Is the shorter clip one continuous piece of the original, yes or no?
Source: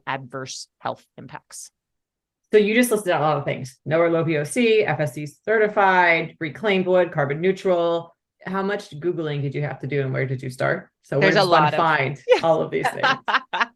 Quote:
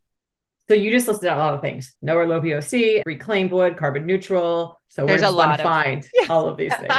no